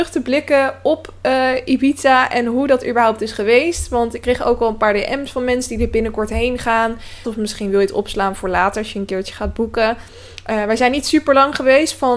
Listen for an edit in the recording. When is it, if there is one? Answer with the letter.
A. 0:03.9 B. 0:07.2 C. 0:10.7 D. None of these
B